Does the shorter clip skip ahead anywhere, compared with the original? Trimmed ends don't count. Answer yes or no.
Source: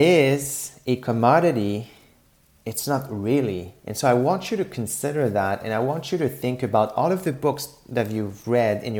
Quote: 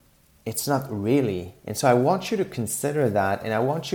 no